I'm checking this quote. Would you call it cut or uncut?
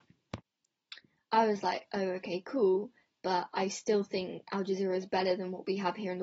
uncut